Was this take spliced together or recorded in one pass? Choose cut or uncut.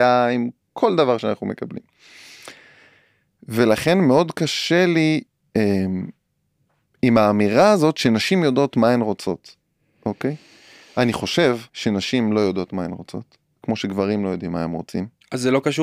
cut